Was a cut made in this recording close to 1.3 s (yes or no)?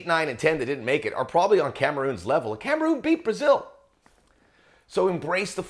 no